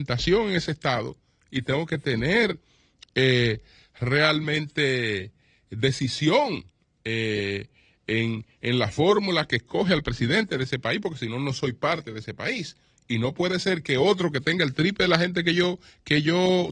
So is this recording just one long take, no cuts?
yes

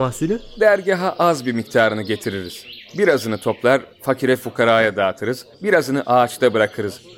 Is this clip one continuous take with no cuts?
no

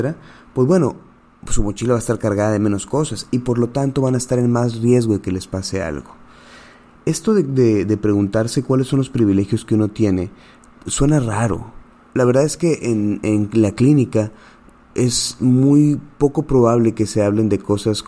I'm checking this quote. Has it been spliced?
no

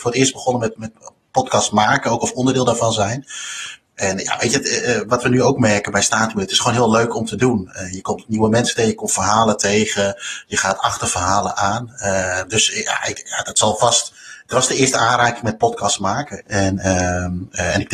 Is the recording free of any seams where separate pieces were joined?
no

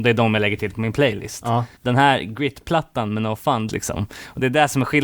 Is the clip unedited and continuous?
no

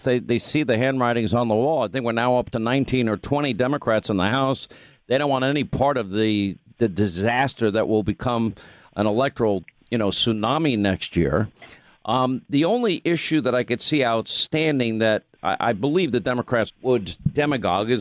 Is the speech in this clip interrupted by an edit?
yes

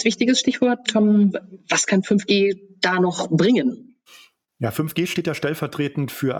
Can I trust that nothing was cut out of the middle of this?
yes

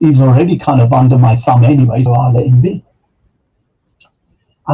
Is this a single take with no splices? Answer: no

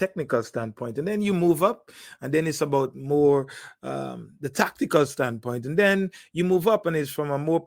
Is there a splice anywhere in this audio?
no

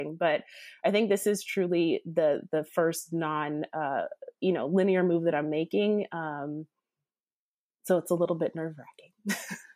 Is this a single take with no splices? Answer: yes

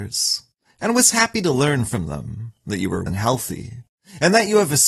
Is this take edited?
yes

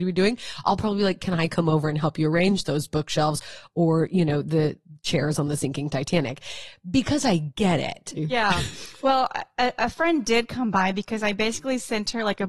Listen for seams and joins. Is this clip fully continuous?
no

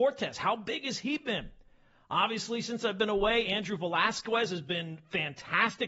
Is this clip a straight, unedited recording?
yes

